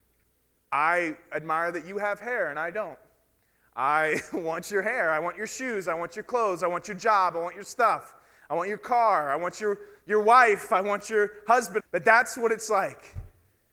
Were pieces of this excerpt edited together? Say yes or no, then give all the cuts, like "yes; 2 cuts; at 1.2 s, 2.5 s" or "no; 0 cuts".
yes; 1 cut; at 11.8 s